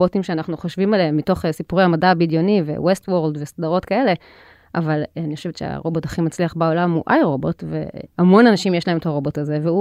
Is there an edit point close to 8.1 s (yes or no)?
yes